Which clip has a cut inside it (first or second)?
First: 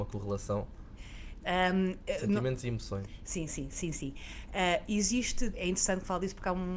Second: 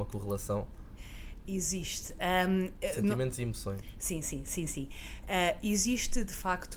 first